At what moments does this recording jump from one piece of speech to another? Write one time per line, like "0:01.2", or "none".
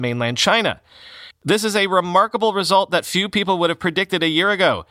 0:01.3